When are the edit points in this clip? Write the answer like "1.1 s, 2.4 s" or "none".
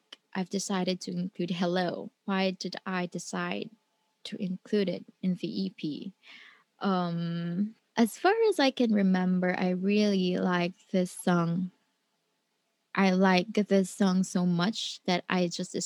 2.2 s

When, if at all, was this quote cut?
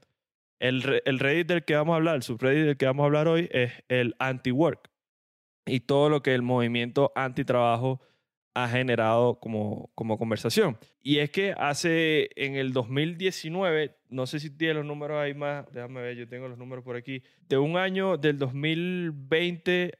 15.7 s, 17.4 s

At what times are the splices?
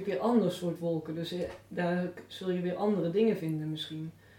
none

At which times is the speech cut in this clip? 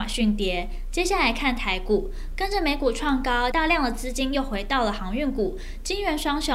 3.5 s

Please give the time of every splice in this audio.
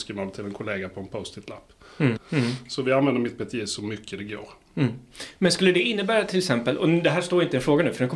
2.2 s

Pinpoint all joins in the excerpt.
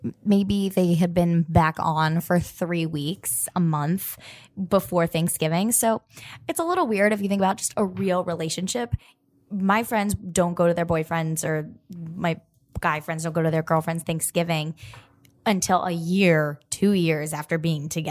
none

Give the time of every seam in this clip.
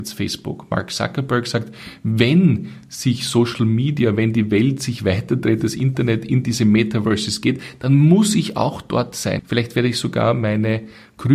9.4 s

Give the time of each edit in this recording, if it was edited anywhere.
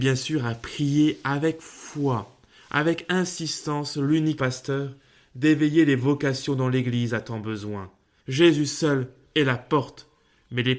4.4 s, 8.2 s

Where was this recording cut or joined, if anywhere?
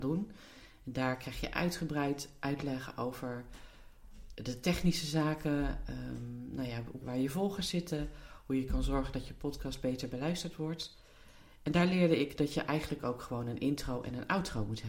7.0 s

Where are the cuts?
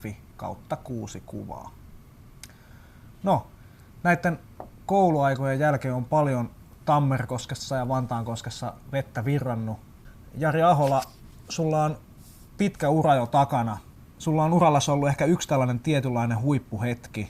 none

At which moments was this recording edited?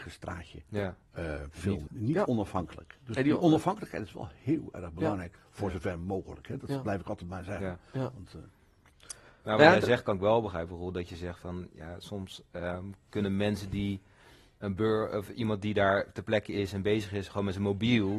1.9 s

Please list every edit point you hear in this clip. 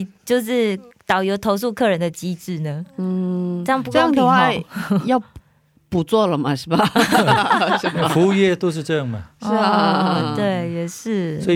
none

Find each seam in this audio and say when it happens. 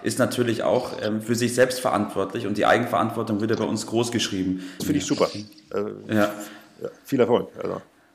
4.8 s

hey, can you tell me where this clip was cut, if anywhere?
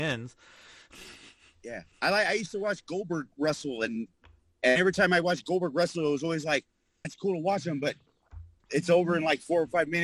1.9 s, 7.0 s

